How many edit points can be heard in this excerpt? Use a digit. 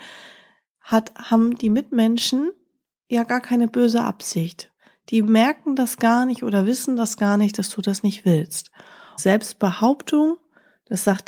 1